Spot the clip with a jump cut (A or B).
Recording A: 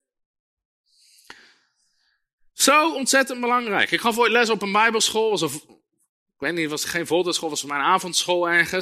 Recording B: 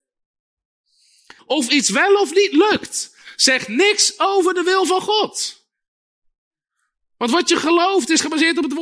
B